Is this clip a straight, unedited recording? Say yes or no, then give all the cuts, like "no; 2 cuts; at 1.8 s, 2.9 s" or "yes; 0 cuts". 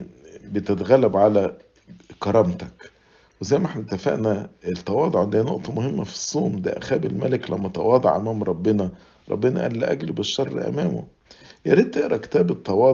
yes; 0 cuts